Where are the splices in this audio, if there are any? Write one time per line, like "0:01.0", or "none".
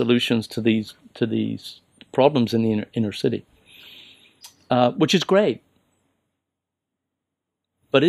none